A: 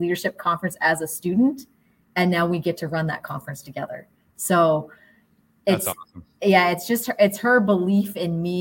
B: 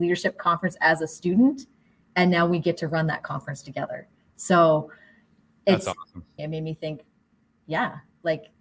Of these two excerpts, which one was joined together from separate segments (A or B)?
B